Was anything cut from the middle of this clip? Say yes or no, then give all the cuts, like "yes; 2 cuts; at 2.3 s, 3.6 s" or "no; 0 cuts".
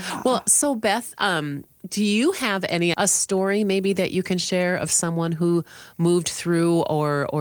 yes; 1 cut; at 2.9 s